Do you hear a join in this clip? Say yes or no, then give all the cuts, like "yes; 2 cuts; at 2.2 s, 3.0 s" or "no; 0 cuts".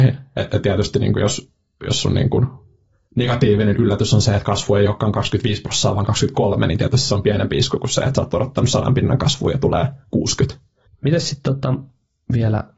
yes; 1 cut; at 10.9 s